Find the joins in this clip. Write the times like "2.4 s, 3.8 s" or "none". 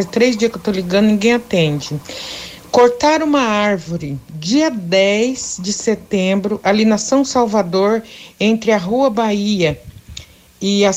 none